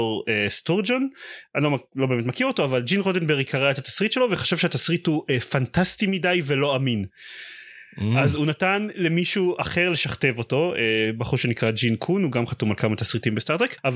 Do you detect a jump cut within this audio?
no; 0 cuts

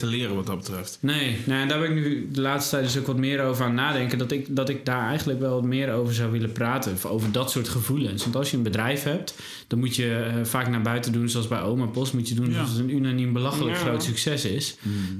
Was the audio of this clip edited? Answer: no; 0 cuts

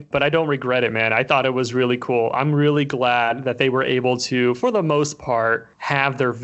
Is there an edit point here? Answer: no; 0 cuts

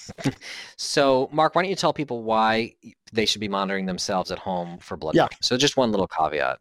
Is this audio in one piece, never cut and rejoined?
no; 1 cut; at 5.4 s

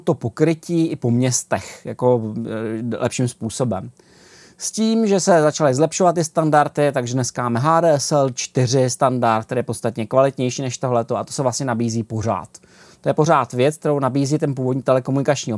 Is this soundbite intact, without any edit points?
yes; 0 cuts

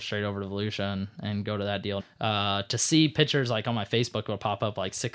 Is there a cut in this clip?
yes; 1 cut; at 2.0 s

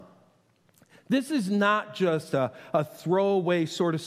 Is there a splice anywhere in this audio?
no; 0 cuts

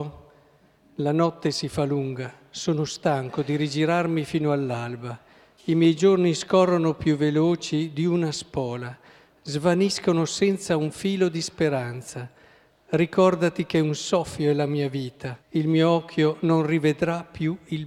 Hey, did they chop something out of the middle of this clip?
yes; 1 cut; at 15.4 s

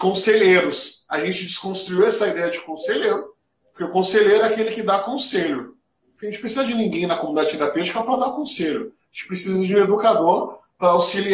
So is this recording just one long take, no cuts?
yes; 0 cuts

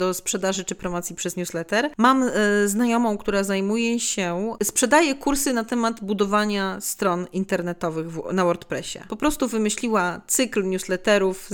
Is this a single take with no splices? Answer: no; 1 cut; at 9.1 s

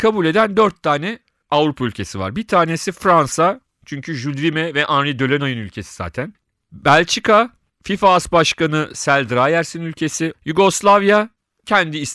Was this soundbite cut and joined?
yes; 1 cut; at 10.3 s

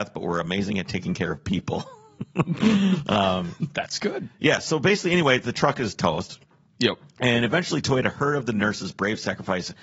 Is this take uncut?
yes; 0 cuts

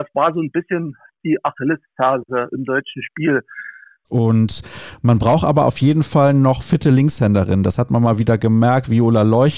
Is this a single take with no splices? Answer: no; 1 cut; at 4.0 s

